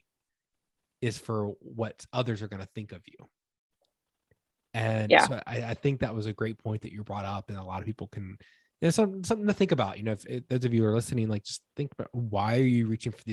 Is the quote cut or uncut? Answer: uncut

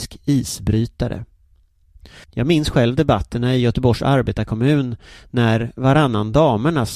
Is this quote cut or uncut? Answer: cut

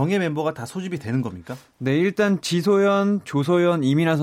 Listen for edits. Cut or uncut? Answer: uncut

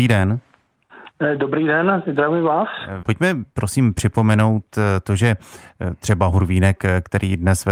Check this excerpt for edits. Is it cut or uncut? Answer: cut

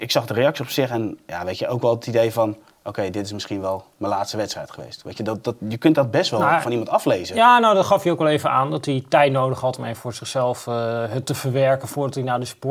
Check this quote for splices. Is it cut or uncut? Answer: cut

